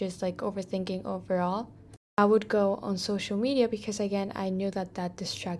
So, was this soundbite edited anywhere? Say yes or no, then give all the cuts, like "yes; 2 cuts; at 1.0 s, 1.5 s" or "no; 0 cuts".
no; 0 cuts